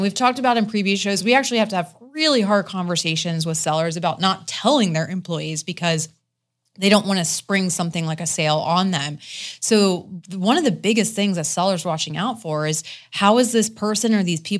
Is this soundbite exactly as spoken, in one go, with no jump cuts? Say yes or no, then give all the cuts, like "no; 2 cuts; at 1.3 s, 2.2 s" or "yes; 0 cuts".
yes; 0 cuts